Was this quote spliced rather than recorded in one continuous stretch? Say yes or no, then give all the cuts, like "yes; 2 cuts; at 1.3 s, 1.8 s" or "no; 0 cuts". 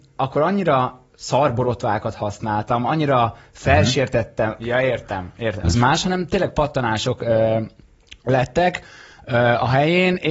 yes; 2 cuts; at 4.6 s, 5.6 s